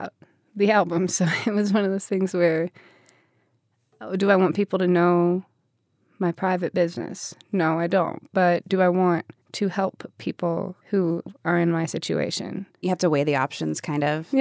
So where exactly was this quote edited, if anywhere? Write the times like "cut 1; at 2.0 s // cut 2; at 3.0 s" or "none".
cut 1; at 9.4 s // cut 2; at 10.8 s // cut 3; at 12.8 s